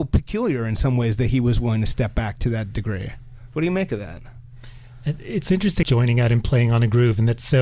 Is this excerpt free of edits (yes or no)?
no